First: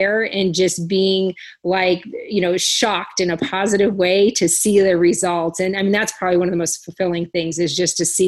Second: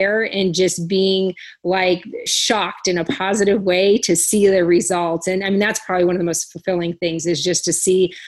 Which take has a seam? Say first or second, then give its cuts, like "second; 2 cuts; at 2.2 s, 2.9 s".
second; 1 cut; at 2.3 s